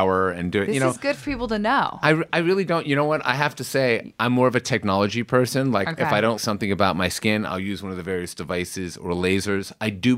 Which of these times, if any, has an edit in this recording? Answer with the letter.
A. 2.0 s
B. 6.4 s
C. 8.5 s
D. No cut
B